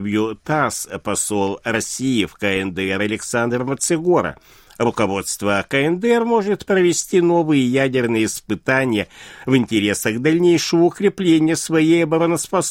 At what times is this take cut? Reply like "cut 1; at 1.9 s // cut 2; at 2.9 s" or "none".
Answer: none